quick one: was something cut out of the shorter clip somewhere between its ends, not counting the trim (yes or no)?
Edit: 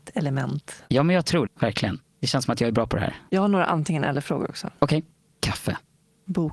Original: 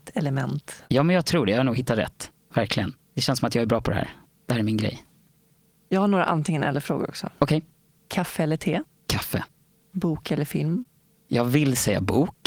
yes